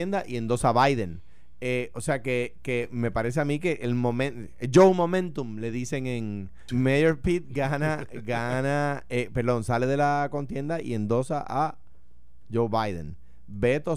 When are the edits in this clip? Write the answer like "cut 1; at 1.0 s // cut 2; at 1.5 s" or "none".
cut 1; at 6.7 s

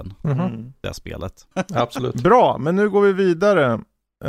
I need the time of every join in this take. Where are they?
cut 1; at 1.5 s

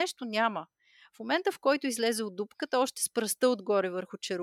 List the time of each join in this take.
none

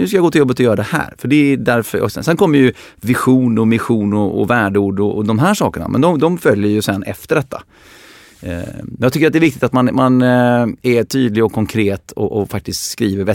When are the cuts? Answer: none

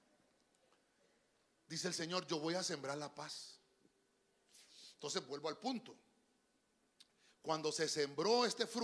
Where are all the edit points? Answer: none

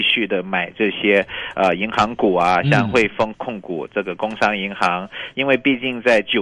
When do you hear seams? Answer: cut 1; at 3.3 s // cut 2; at 5.3 s

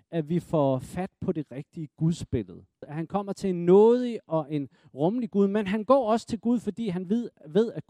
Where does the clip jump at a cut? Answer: cut 1; at 2.8 s

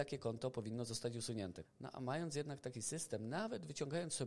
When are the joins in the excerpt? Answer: cut 1; at 1.6 s

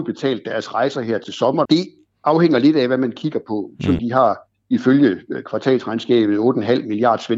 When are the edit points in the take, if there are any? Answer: cut 1; at 1.7 s // cut 2; at 4.0 s

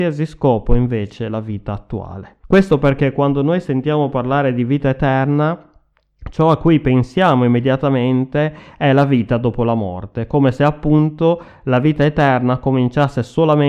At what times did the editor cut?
cut 1; at 2.4 s

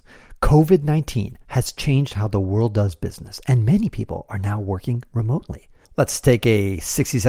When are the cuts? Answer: cut 1; at 5.8 s

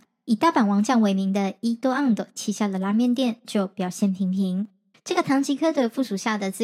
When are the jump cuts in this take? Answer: cut 1; at 4.9 s

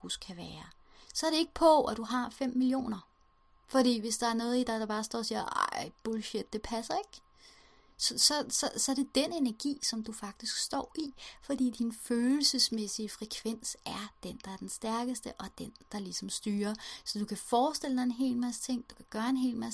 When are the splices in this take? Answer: none

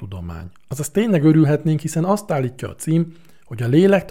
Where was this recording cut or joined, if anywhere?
none

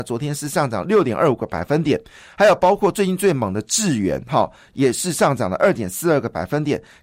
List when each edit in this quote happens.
none

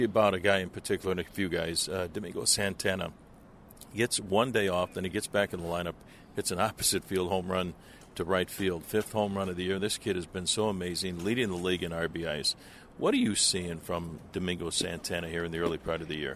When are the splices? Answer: none

